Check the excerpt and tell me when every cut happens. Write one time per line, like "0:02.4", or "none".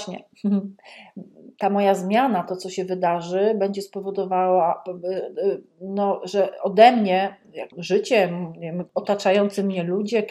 0:07.7